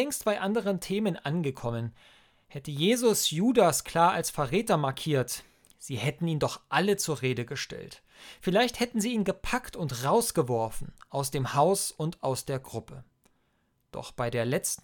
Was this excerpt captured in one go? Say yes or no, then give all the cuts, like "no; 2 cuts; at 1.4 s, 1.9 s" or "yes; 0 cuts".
yes; 0 cuts